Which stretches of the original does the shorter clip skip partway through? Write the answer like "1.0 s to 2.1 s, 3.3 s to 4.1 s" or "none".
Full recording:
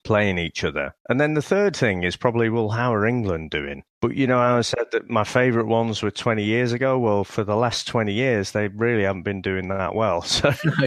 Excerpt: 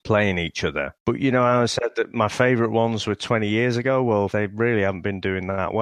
1.0 s to 4.0 s, 7.3 s to 8.5 s